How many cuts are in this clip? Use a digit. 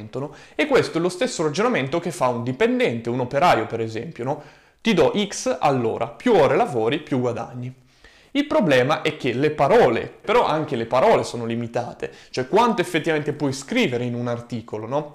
1